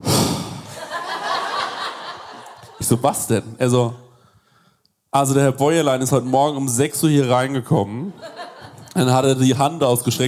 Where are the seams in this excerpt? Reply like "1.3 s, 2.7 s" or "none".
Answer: none